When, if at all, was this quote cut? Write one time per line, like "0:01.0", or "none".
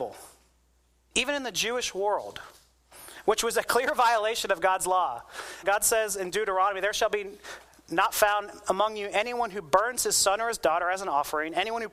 0:05.6